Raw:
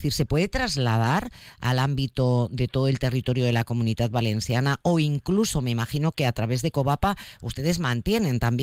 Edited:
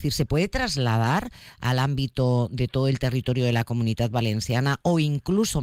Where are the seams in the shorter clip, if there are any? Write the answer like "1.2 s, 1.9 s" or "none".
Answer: none